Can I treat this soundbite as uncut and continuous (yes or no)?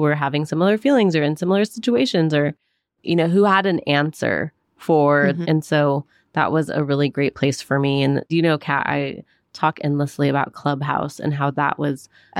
no